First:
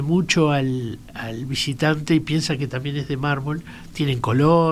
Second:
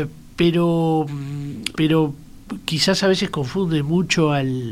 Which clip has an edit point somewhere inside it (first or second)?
second